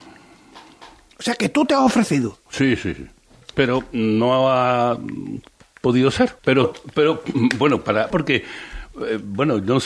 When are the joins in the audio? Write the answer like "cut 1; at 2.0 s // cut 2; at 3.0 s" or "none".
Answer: cut 1; at 6.4 s // cut 2; at 8.1 s

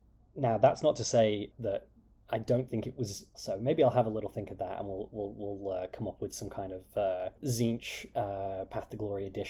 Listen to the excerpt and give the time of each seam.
cut 1; at 1.5 s // cut 2; at 3.3 s // cut 3; at 7.4 s

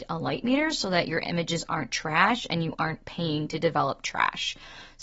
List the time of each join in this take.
none

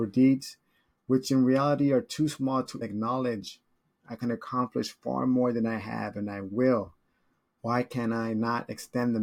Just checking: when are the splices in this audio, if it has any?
cut 1; at 2.8 s // cut 2; at 7.6 s

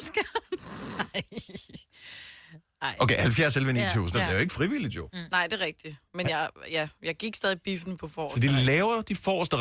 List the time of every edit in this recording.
cut 1; at 4.1 s

